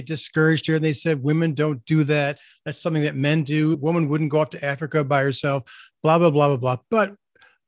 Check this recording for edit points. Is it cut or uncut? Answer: uncut